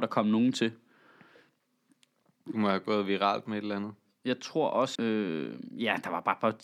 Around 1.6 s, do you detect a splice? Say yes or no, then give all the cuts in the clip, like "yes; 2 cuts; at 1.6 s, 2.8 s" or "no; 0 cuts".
no; 1 cut; at 5.0 s